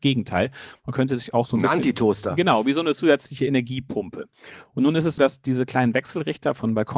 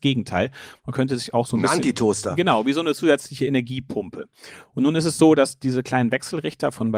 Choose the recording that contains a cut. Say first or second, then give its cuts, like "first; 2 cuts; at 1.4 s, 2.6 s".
first; 1 cut; at 5.2 s